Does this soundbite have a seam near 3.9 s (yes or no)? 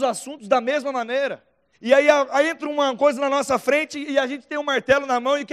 no